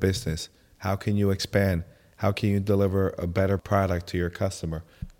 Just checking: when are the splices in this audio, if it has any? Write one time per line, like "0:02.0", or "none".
none